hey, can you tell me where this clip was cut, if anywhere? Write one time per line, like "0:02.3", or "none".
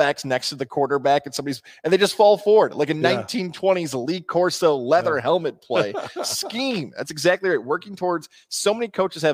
none